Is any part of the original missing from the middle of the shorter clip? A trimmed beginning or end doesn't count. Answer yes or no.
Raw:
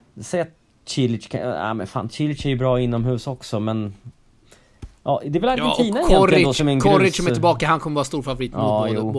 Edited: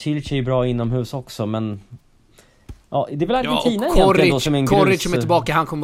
no